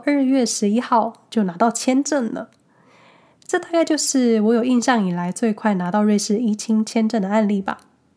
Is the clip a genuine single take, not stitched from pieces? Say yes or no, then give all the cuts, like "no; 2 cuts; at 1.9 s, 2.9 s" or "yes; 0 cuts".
yes; 0 cuts